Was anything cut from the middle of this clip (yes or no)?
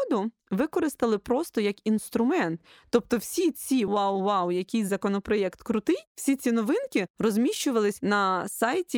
yes